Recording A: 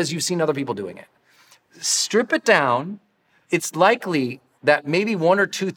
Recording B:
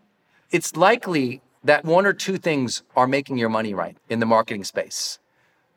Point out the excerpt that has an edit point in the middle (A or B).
B